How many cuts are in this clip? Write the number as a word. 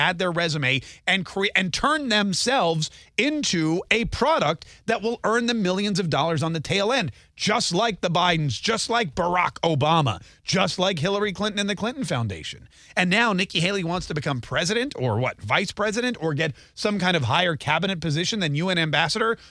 zero